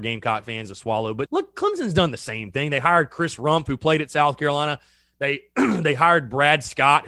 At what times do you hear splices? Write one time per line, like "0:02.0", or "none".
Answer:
0:01.3